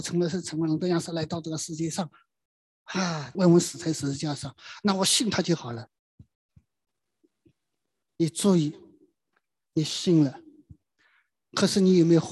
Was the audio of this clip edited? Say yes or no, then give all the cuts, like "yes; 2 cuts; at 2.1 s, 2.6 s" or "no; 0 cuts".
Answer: yes; 1 cut; at 3.3 s